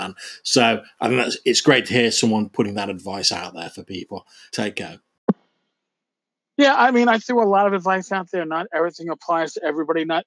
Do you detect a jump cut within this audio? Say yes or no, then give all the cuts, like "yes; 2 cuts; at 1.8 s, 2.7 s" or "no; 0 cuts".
yes; 1 cut; at 4.5 s